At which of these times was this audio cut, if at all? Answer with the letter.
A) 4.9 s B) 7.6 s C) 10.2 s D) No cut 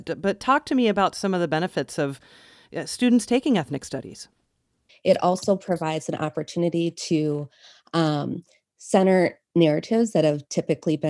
A